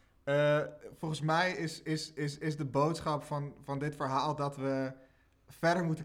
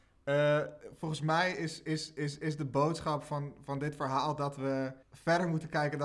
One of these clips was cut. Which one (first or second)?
second